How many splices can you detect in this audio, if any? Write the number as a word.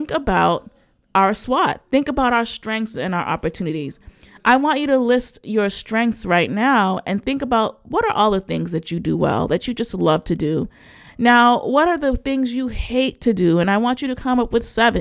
one